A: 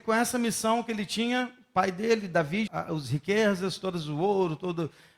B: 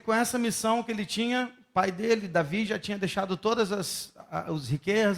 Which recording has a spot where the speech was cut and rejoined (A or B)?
A